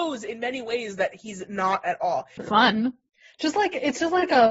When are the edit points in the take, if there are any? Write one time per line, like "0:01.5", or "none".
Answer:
0:02.4